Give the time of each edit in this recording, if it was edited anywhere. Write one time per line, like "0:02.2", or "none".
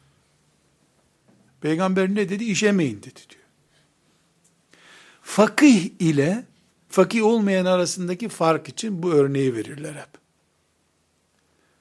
0:01.5